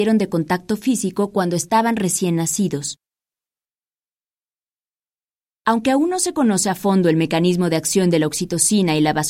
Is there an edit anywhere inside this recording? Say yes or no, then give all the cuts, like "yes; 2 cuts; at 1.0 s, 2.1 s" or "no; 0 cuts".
no; 0 cuts